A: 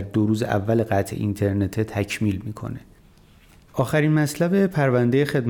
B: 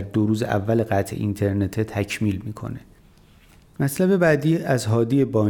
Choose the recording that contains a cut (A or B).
A